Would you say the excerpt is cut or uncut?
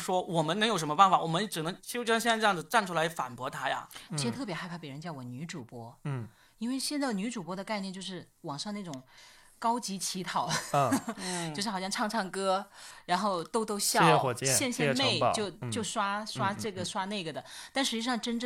cut